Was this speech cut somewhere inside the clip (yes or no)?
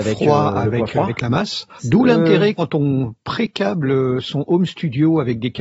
yes